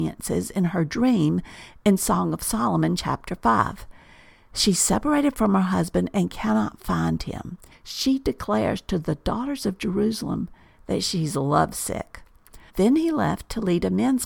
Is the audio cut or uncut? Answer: cut